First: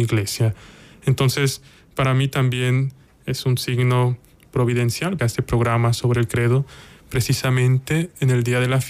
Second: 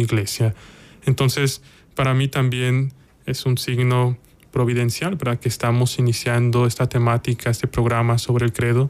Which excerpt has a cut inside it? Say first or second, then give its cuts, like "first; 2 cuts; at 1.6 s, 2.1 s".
first; 1 cut; at 5.2 s